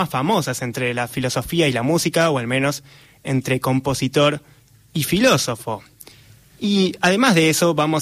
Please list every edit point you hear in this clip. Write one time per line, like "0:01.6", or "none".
none